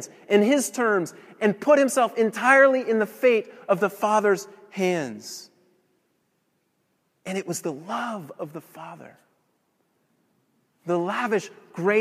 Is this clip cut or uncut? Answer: uncut